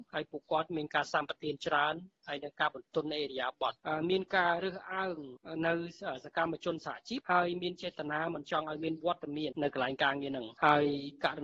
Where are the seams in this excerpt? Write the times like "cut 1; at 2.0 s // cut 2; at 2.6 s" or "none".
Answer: cut 1; at 9.5 s